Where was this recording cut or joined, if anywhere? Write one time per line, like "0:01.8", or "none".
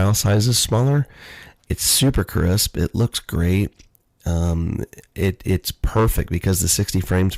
none